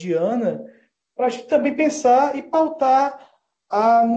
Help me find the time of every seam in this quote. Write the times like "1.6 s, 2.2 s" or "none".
none